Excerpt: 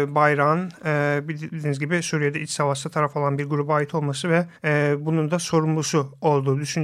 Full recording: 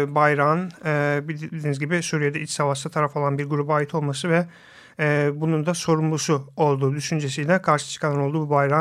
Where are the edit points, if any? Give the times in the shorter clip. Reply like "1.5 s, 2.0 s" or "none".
4.6 s